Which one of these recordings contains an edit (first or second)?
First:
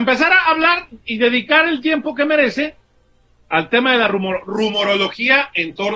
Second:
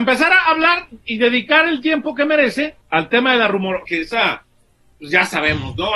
second